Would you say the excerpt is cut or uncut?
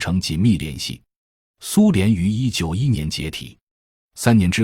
cut